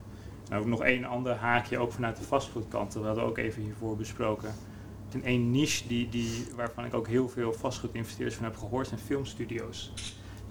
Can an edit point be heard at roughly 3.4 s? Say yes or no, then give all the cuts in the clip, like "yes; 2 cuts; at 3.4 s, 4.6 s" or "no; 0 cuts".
no; 1 cut; at 5.1 s